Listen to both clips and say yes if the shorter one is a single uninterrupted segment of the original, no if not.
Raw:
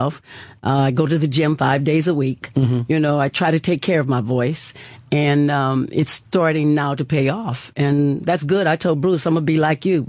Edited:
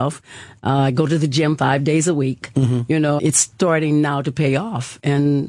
no